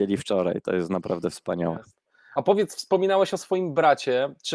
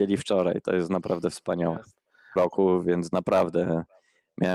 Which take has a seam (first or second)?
second